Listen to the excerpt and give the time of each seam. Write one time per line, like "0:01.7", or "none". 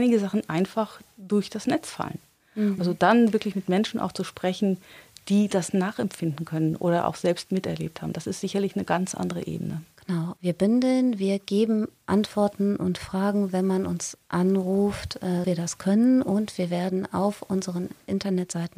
0:02.8
0:15.4